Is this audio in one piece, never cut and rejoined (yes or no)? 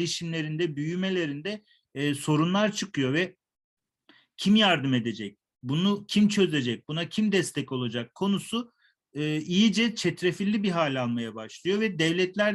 yes